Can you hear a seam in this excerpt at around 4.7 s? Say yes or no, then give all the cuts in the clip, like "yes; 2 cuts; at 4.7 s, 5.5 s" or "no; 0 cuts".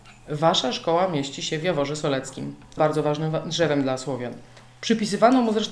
no; 1 cut; at 2.8 s